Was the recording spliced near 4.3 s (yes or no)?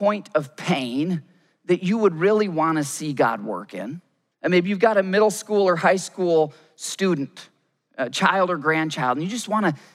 yes